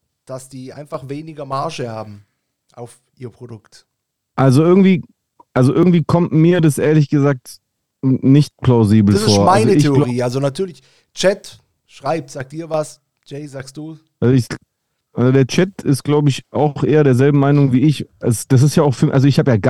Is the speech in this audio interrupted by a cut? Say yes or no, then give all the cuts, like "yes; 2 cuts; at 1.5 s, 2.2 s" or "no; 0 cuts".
no; 0 cuts